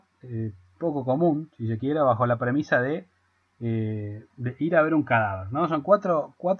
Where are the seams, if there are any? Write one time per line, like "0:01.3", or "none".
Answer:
0:04.3